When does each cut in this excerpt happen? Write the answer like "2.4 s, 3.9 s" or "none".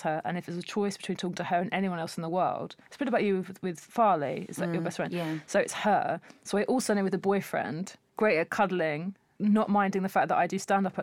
8.1 s